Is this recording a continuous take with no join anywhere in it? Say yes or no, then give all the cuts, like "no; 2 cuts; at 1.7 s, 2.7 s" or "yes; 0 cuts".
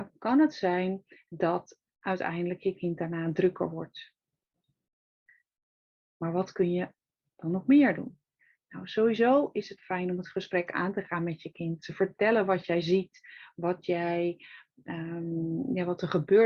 yes; 0 cuts